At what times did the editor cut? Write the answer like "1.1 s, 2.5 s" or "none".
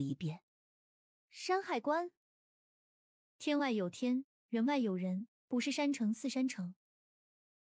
none